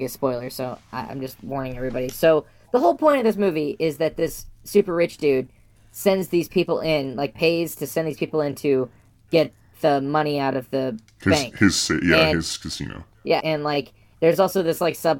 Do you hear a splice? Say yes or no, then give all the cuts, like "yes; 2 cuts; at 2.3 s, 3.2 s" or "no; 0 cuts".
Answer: yes; 1 cut; at 13.4 s